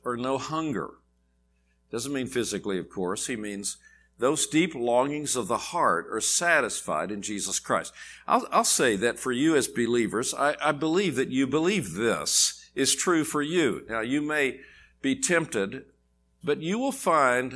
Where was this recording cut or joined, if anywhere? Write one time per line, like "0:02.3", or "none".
0:16.4